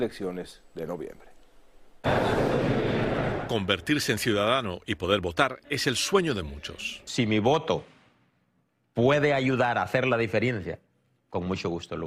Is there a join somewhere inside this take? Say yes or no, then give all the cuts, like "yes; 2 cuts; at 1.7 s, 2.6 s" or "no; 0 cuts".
no; 0 cuts